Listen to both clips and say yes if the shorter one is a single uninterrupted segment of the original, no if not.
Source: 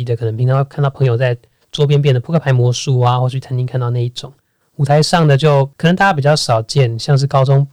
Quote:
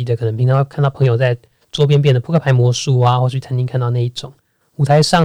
yes